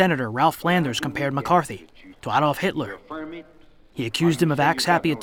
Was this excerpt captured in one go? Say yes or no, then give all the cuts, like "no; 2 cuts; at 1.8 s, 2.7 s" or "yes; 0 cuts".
no; 1 cut; at 2.1 s